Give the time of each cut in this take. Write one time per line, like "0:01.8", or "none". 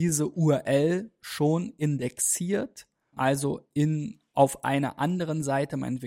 0:03.1